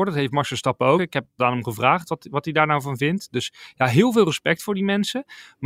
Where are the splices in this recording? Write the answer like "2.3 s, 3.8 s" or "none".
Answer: 1.0 s